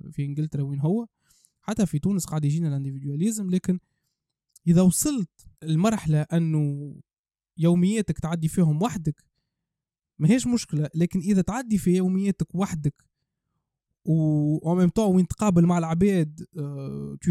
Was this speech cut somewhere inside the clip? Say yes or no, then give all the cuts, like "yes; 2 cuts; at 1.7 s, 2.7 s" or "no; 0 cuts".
yes; 1 cut; at 5.5 s